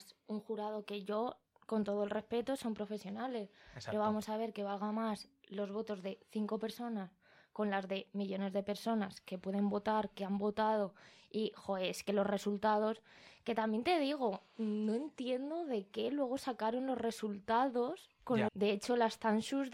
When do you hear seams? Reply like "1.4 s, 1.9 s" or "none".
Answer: 18.5 s